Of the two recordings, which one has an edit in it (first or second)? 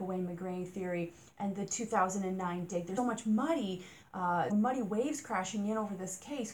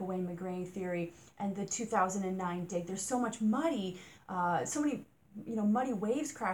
first